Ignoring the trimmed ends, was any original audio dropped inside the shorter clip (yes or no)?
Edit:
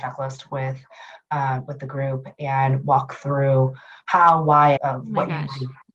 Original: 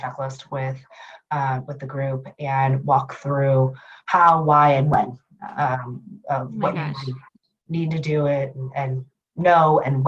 yes